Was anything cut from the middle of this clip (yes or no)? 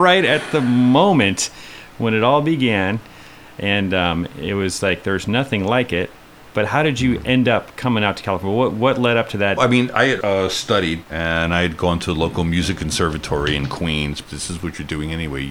yes